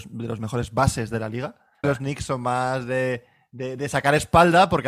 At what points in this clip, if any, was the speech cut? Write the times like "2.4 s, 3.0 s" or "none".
1.8 s